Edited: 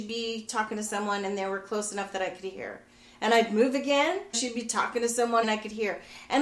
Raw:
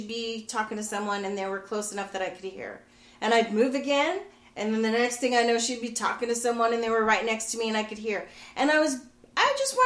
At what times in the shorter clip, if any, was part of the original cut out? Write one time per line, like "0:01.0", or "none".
0:04.3
0:05.4